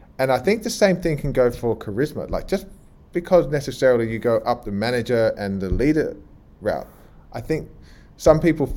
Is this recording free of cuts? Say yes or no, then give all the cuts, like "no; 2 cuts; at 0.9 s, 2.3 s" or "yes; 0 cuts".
no; 1 cut; at 4.6 s